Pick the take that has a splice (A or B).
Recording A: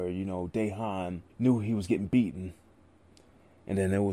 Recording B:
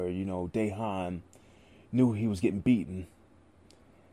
A